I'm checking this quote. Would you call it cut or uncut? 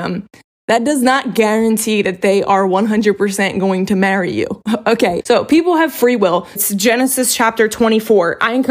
cut